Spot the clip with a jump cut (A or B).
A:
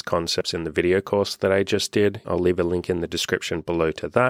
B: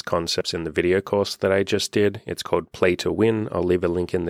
A